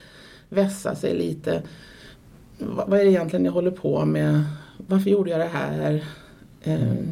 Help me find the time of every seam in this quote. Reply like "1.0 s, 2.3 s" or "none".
2.9 s